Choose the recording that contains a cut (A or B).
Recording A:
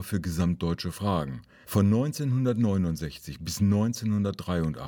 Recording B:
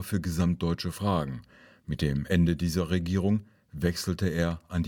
A